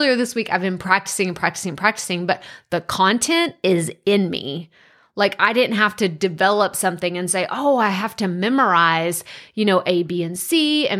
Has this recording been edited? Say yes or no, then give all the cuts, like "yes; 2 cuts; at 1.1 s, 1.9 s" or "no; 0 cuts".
no; 0 cuts